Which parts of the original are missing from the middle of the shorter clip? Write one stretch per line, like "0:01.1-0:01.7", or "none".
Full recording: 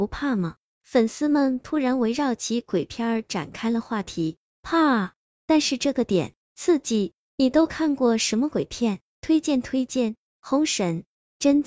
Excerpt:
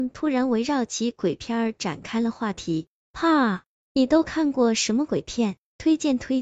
0:05.3-0:07.3